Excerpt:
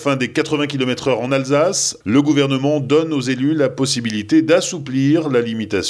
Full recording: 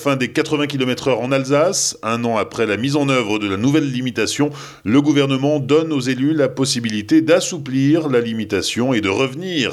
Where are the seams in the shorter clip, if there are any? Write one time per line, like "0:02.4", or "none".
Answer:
0:02.0